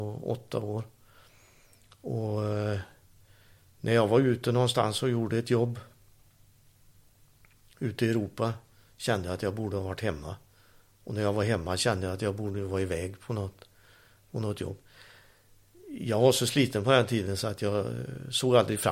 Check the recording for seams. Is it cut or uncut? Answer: uncut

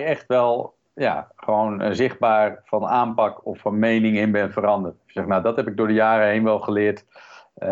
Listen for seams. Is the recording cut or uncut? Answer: uncut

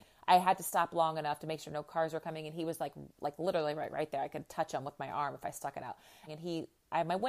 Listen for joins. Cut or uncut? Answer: cut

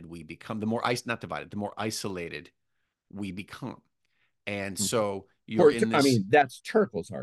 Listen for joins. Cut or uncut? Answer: uncut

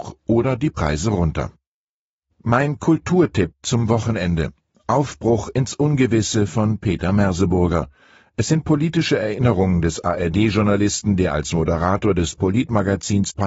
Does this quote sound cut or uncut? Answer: uncut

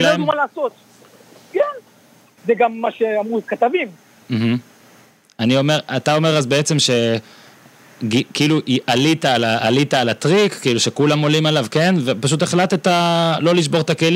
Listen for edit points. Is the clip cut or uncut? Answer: cut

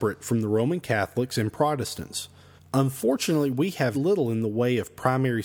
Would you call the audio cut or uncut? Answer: cut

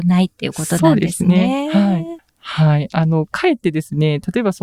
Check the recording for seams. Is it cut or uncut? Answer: cut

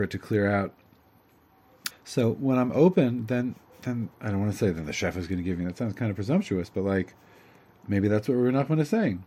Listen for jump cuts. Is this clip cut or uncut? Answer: cut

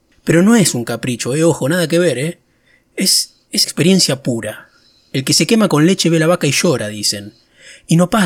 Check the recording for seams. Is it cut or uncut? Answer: cut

